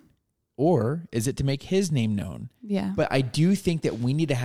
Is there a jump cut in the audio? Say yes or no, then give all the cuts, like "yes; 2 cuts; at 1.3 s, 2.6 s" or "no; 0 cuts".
yes; 1 cut; at 3.0 s